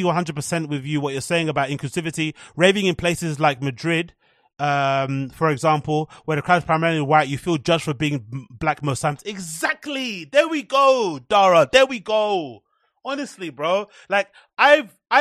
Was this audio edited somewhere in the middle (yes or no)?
no